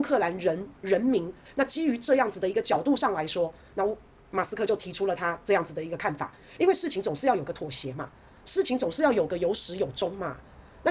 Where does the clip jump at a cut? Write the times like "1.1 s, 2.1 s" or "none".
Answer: 1.5 s

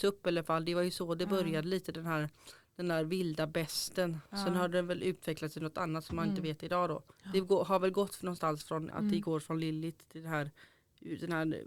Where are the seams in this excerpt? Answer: 7.1 s, 8.9 s

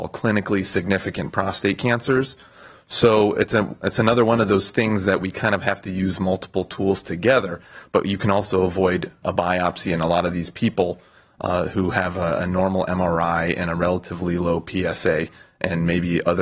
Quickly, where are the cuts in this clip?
9.2 s

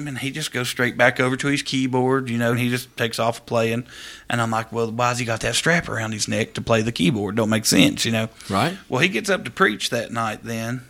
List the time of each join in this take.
2.5 s

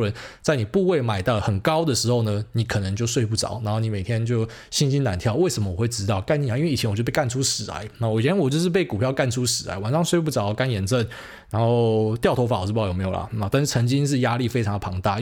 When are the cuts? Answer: none

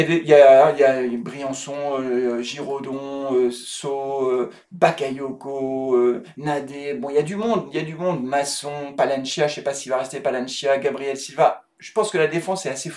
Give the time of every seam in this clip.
none

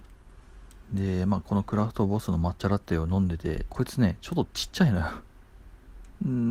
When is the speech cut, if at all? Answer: 3.7 s

